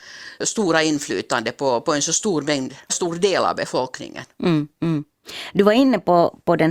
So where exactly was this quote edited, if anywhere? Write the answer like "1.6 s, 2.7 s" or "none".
2.9 s